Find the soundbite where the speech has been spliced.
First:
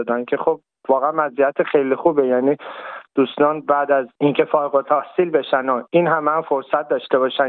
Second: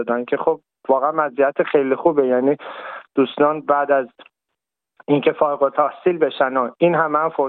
first; 1 cut; at 4.1 s

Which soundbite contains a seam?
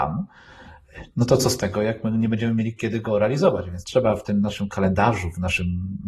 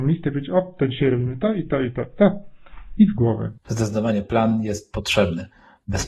second; 1 cut; at 3.6 s

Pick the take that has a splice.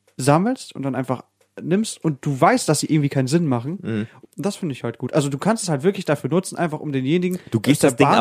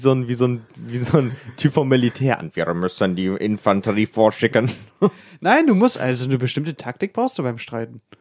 first; 1 cut; at 4.2 s

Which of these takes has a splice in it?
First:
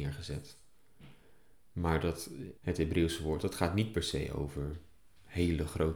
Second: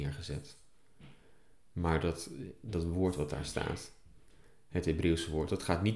first; 1 cut; at 2.6 s

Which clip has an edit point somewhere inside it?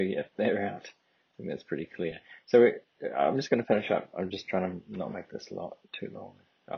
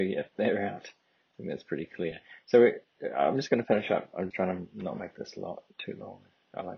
second; 1 cut; at 4.3 s

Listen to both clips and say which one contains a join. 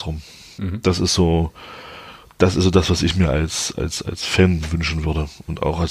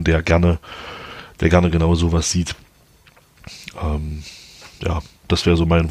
second; 1 cut; at 4.7 s

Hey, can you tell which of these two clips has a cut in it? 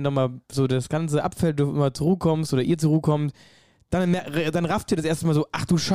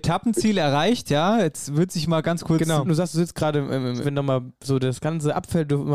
second; 2 cuts; at 2.9 s, 4.0 s

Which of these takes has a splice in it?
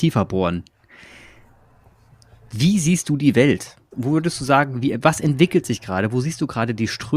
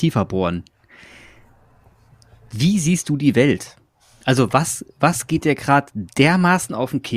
first; 1 cut; at 3.9 s

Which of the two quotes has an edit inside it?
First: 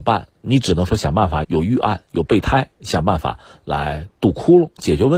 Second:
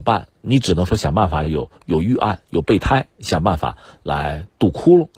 first; 1 cut; at 1.4 s

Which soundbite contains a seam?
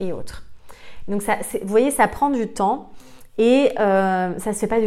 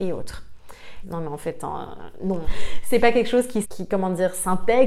second; 3 cuts; at 1.0 s, 2.4 s, 3.6 s

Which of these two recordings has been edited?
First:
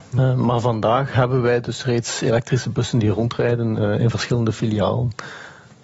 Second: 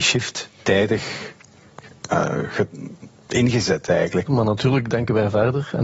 second; 1 cut; at 4.3 s

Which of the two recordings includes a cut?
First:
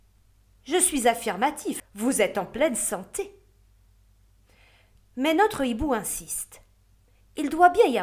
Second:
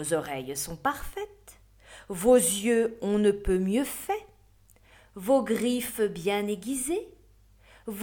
first; 1 cut; at 1.8 s

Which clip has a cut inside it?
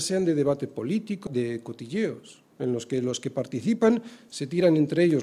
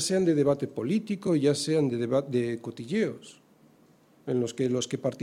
first; 2 cuts; at 1.3 s, 2.5 s

